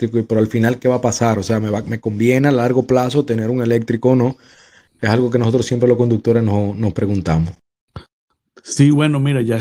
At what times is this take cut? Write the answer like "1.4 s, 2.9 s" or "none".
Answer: none